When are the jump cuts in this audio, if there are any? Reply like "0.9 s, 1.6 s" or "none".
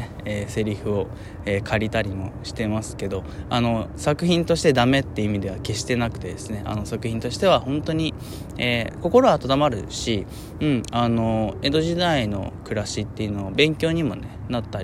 none